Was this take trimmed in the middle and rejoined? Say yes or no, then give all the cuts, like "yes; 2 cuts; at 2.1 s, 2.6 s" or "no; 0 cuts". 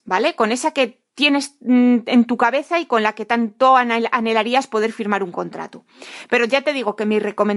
no; 0 cuts